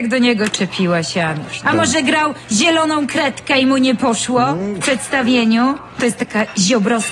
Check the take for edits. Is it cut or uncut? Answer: cut